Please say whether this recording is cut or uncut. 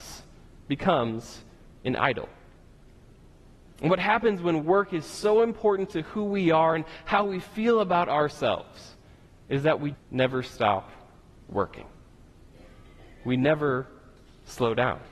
cut